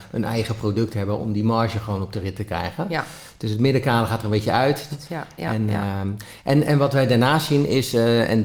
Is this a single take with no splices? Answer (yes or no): no